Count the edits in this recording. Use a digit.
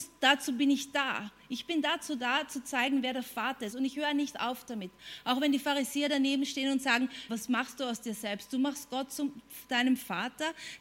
2